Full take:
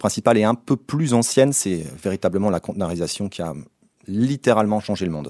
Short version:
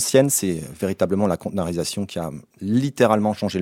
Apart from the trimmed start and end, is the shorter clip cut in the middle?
yes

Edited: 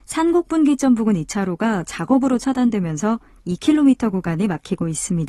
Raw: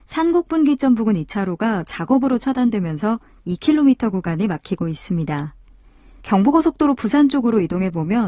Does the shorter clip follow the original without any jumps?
yes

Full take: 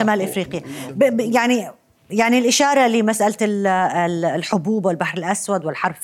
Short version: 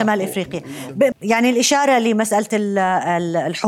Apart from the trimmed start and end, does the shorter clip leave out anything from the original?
yes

